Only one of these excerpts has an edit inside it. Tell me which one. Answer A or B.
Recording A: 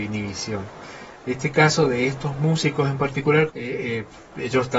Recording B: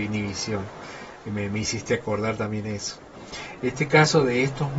A